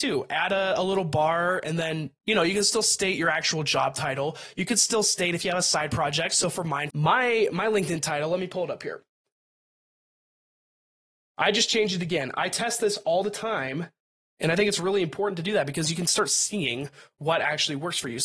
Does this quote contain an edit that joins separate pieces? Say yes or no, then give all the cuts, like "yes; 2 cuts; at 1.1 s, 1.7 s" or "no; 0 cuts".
yes; 1 cut; at 6.9 s